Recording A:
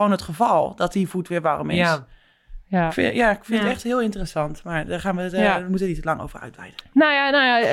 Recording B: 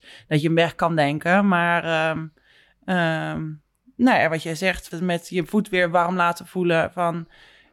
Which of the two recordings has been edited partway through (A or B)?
B